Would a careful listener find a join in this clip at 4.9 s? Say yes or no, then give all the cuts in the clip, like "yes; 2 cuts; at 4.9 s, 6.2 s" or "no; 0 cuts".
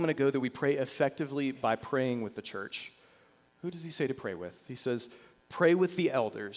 no; 1 cut; at 3.5 s